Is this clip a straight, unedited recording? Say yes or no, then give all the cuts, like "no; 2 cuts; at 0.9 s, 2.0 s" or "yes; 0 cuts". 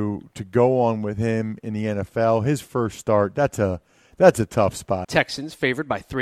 no; 1 cut; at 5.0 s